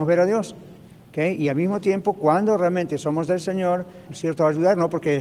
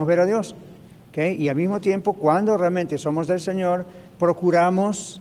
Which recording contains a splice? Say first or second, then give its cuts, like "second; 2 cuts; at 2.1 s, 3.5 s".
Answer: first; 1 cut; at 4.1 s